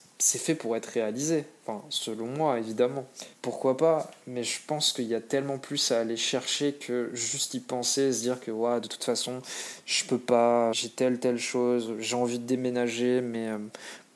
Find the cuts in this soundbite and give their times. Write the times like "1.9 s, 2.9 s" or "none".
3.4 s, 10.7 s